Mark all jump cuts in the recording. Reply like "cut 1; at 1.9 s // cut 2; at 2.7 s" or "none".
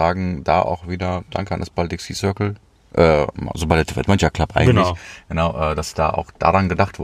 none